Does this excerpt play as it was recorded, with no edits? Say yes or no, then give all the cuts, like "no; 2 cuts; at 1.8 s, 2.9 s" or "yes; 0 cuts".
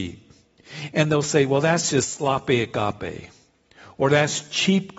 no; 1 cut; at 0.9 s